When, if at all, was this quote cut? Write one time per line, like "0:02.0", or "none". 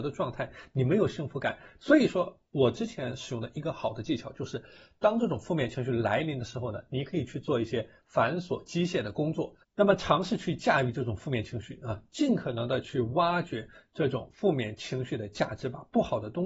0:01.8
0:09.6